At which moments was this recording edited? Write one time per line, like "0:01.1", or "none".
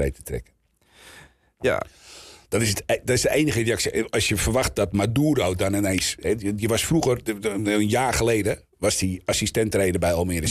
none